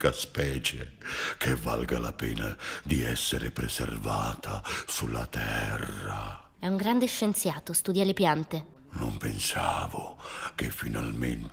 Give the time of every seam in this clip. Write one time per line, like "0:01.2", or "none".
0:06.5
0:08.7